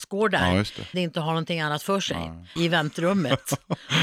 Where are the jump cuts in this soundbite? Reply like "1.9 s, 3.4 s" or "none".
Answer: 0.9 s, 2.6 s

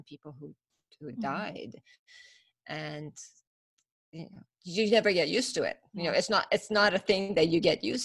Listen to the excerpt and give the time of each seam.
none

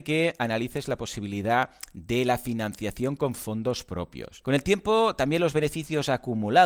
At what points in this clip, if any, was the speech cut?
4.4 s

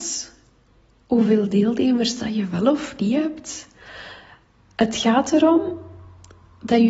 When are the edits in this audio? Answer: none

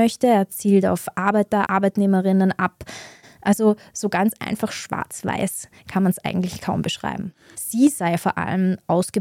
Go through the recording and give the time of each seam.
1.6 s, 3.2 s, 7.5 s

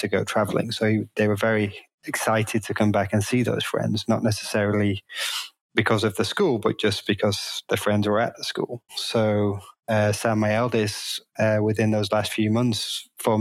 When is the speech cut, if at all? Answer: 8.9 s

